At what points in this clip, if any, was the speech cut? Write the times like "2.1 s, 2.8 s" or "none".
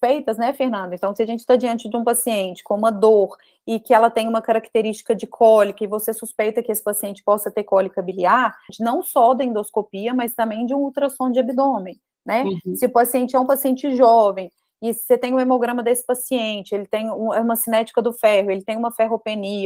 8.7 s